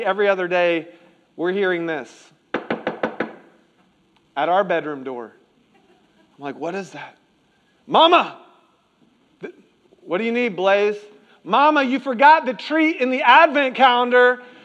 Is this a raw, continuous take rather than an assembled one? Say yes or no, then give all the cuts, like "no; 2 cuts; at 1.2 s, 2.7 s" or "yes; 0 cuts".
yes; 0 cuts